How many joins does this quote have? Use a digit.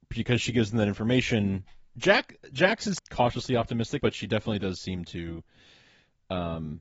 2